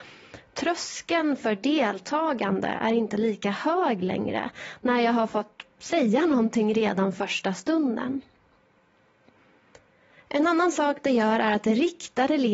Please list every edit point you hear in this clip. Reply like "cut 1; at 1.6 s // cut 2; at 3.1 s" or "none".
none